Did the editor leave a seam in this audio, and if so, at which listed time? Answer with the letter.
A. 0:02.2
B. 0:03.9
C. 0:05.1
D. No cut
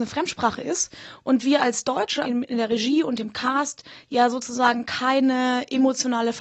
A